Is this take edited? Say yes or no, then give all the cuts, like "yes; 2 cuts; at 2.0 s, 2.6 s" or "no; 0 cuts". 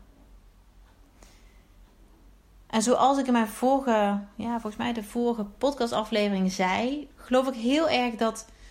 yes; 1 cut; at 7.1 s